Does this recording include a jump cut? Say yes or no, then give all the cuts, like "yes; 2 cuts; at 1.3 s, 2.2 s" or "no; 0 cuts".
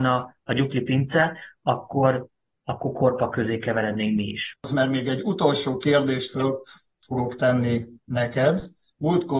yes; 1 cut; at 4.5 s